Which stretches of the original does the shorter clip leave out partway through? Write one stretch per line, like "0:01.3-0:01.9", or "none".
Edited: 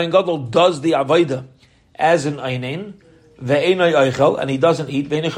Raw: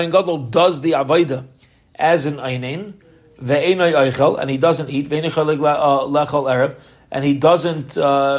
none